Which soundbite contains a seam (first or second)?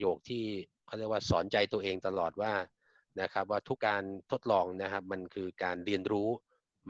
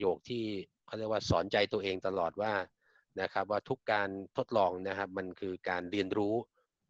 first